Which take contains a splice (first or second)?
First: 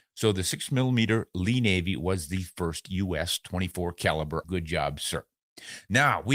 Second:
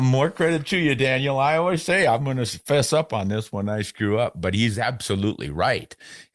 first